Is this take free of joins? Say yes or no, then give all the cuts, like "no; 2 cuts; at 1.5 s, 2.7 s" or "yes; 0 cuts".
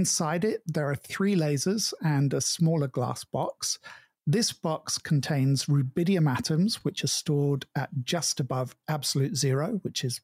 yes; 0 cuts